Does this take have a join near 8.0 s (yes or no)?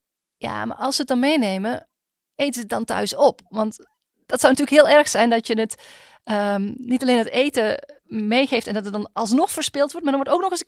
yes